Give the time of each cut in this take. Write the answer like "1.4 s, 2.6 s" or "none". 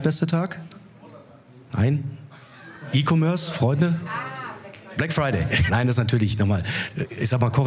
5.7 s